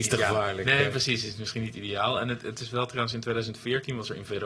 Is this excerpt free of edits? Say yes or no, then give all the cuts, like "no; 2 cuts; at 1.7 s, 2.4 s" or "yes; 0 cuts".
yes; 0 cuts